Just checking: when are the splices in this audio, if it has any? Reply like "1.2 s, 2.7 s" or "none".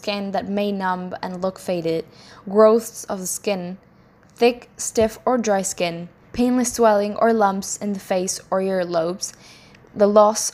6.2 s